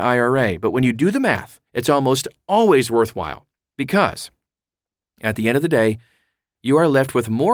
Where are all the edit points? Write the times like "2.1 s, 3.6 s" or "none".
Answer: 1.7 s